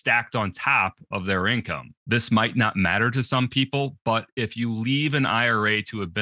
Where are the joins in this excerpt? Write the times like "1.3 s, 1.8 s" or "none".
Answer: 2.0 s

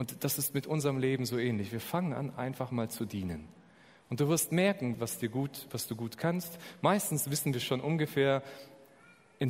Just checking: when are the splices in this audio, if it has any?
4.9 s

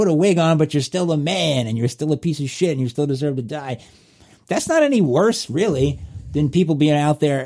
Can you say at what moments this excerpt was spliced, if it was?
none

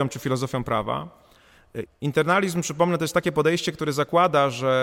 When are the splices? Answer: 1.9 s

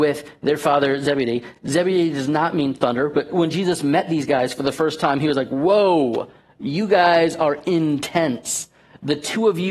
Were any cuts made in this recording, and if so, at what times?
none

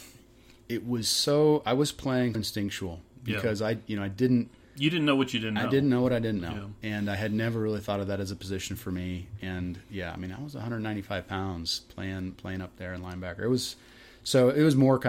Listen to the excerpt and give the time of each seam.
2.3 s

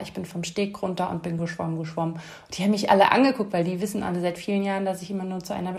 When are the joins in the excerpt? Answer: 1.4 s

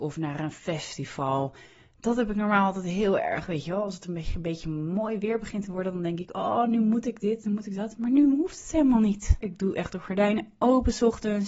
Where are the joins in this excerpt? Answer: 9.4 s

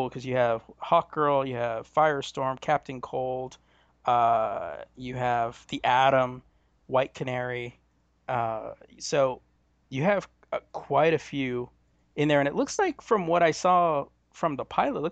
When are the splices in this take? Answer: none

